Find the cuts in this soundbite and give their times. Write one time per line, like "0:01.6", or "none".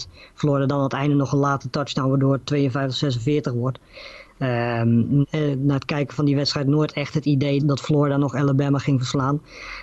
0:05.2
0:07.6